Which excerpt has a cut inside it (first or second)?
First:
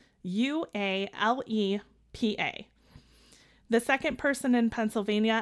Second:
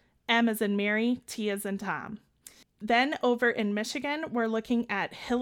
second